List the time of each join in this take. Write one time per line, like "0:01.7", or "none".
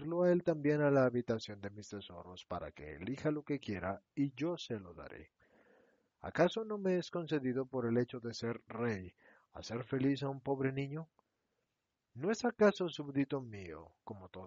none